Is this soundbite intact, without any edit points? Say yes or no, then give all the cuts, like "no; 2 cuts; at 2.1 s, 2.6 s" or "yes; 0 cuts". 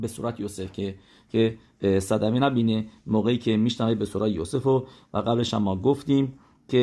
yes; 0 cuts